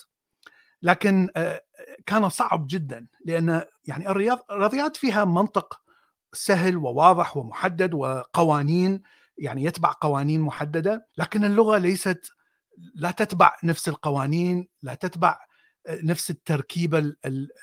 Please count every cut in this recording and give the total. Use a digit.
1